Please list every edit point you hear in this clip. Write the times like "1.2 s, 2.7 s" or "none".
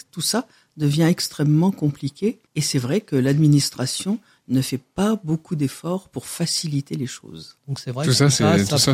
2.5 s, 7.6 s